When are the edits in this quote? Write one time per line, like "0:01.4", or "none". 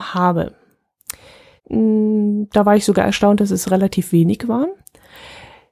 0:01.6